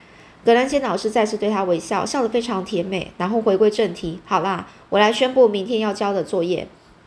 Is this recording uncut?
yes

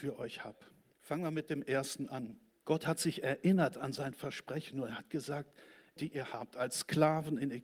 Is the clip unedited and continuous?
no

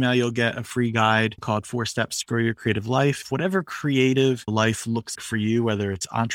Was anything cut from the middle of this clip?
yes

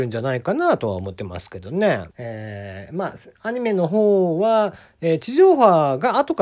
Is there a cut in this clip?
yes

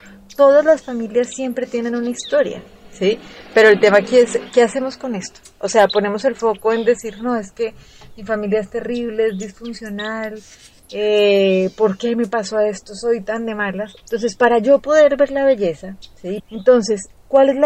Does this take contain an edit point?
yes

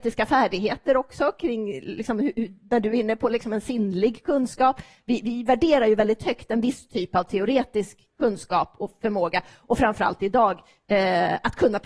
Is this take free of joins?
yes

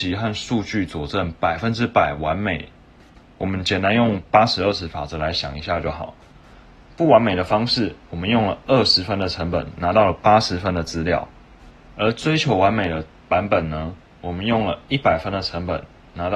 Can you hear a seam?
no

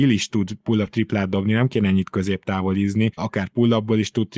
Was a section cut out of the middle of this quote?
yes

